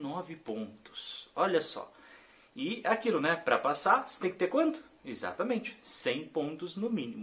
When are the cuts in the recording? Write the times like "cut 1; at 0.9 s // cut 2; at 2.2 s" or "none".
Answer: none